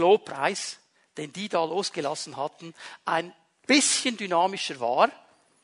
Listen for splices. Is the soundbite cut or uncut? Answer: uncut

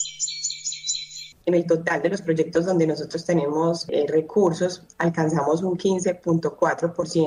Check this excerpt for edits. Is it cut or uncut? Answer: cut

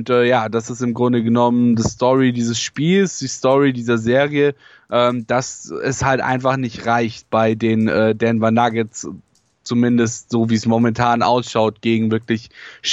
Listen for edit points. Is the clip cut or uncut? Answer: uncut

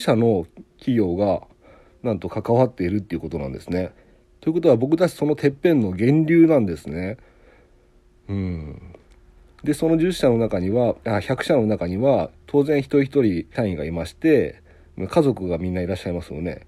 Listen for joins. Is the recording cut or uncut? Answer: cut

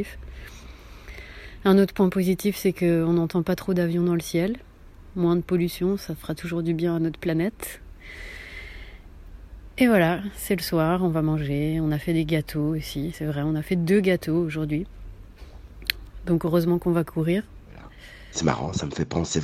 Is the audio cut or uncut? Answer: uncut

